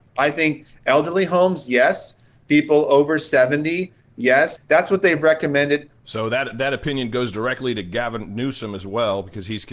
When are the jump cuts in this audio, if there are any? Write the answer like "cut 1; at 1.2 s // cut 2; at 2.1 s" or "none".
cut 1; at 4.6 s // cut 2; at 6.0 s